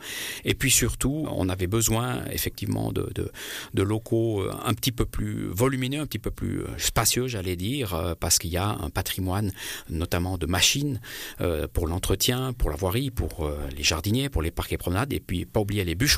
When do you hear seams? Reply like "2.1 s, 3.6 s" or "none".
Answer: 1.2 s